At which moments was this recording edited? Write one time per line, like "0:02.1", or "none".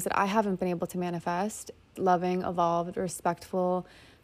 0:02.0